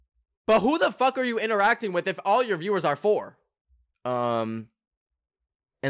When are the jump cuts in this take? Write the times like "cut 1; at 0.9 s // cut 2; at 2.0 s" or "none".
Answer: cut 1; at 3.9 s